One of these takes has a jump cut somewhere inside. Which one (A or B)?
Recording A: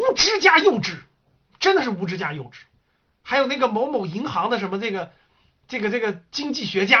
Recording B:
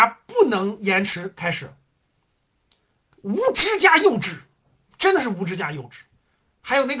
B